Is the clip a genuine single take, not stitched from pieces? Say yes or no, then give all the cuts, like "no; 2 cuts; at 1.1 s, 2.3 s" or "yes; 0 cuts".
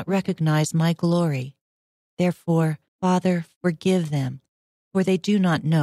no; 1 cut; at 2.9 s